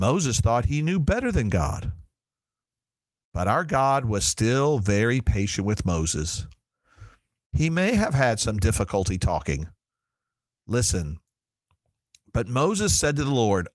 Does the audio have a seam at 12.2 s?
no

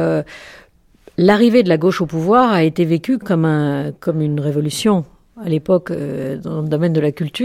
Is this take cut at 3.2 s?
yes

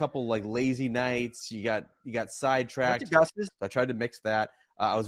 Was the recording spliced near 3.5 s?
yes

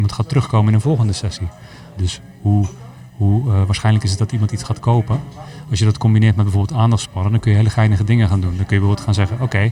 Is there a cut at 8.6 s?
no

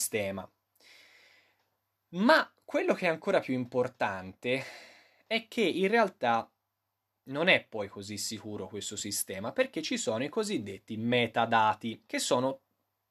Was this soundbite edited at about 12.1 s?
yes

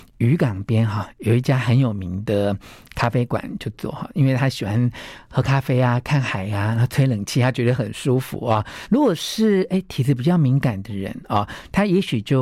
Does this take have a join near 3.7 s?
yes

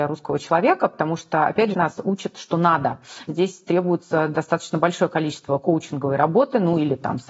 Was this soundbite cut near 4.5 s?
no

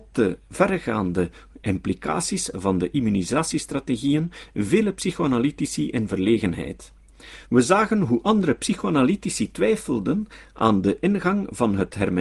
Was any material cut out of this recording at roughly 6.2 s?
no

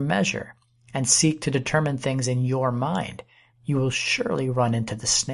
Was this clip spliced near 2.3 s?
no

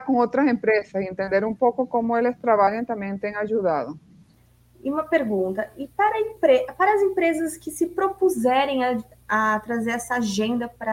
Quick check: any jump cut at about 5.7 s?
no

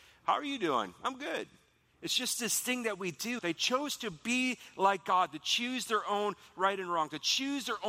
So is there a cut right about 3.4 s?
yes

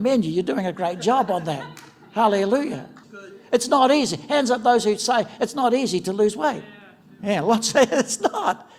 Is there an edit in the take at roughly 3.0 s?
yes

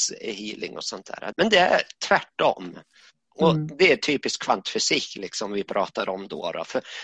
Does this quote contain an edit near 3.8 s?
no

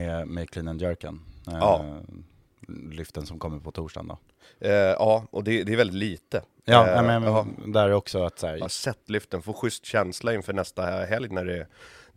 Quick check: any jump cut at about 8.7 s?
yes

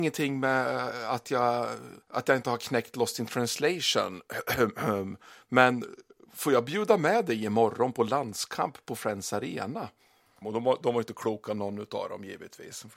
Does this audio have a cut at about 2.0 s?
yes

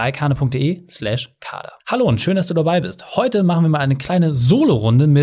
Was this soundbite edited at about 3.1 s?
no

